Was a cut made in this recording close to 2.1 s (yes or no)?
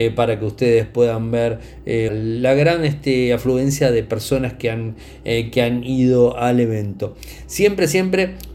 yes